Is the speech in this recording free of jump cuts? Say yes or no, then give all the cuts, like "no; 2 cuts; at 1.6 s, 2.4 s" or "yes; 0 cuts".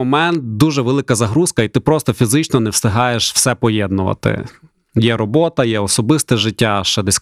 yes; 0 cuts